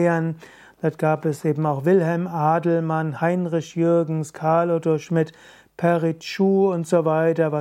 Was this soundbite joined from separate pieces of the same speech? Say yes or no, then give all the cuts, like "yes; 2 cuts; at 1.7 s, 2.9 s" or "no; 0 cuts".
no; 0 cuts